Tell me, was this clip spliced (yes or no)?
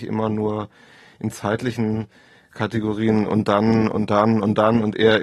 no